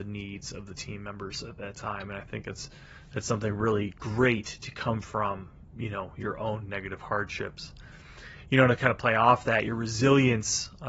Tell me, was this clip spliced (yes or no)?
no